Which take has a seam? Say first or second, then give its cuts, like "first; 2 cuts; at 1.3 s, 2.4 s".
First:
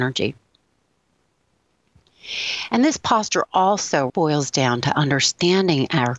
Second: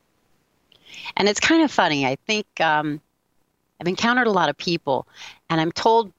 first; 1 cut; at 4.1 s